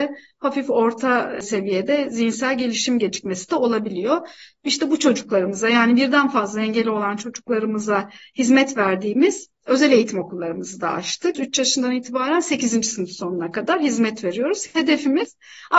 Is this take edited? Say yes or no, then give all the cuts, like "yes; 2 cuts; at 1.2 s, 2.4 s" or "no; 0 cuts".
yes; 1 cut; at 11.3 s